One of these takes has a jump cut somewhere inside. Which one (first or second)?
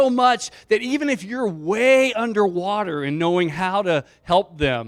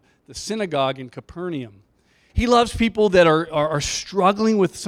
second